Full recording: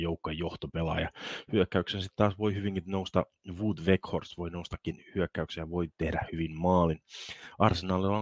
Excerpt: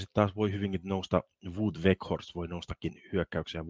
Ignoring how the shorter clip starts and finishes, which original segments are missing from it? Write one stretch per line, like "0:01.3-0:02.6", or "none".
none